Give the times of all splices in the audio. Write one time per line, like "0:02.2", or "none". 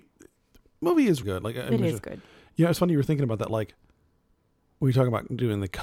0:01.2